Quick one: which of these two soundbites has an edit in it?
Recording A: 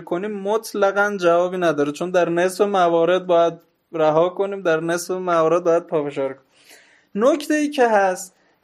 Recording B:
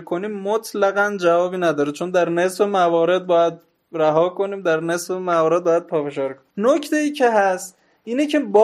B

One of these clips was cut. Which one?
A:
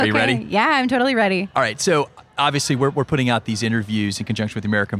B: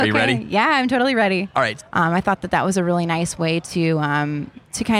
B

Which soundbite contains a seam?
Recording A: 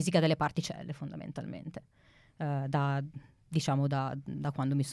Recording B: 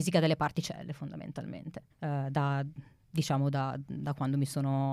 B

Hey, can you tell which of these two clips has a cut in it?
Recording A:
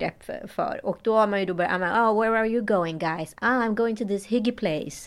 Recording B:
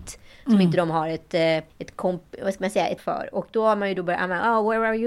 B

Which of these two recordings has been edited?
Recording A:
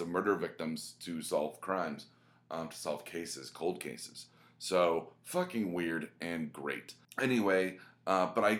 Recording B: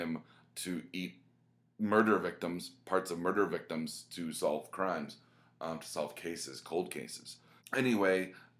B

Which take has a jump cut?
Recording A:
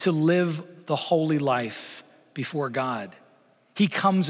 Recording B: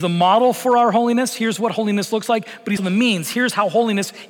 B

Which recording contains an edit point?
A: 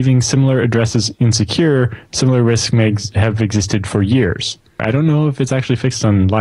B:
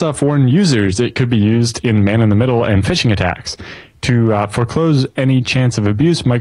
A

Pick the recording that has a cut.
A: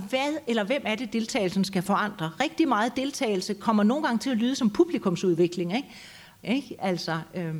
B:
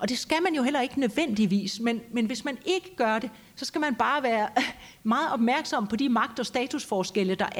A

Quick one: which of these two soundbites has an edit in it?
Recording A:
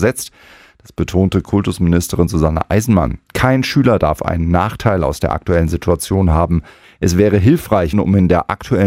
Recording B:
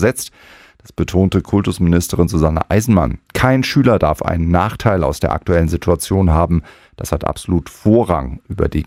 A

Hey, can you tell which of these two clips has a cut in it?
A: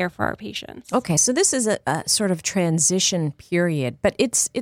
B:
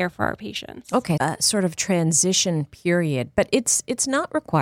B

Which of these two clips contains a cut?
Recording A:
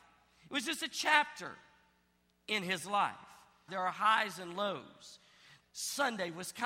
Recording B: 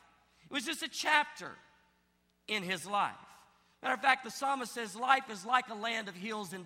A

